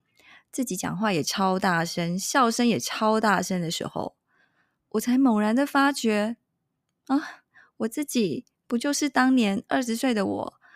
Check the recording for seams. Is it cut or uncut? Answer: uncut